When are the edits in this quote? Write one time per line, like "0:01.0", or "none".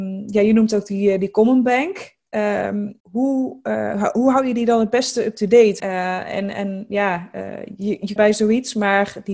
0:03.0
0:05.8
0:08.2